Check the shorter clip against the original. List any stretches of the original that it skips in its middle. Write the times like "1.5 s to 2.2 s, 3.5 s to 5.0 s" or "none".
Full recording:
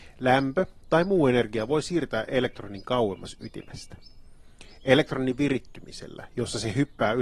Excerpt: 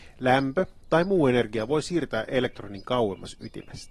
none